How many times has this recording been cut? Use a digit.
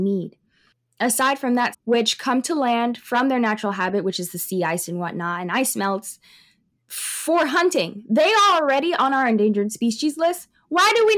1